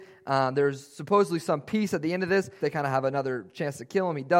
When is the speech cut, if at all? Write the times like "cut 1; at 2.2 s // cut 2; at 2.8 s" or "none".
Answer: cut 1; at 2.6 s